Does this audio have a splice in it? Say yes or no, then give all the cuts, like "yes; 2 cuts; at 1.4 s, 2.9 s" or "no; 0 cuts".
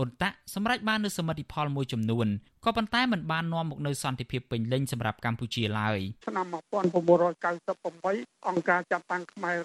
yes; 1 cut; at 6.2 s